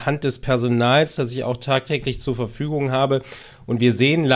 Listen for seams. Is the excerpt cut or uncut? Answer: uncut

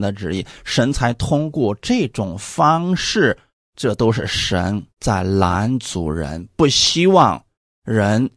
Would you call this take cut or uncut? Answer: cut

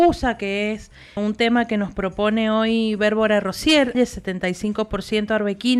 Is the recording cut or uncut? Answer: cut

